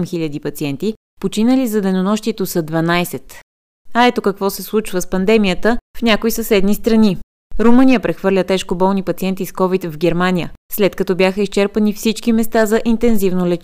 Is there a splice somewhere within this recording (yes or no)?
no